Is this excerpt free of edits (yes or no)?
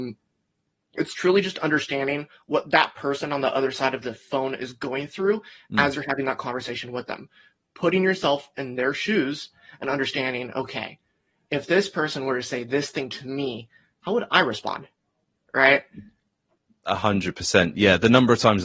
yes